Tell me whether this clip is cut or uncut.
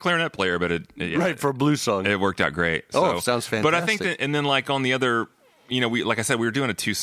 uncut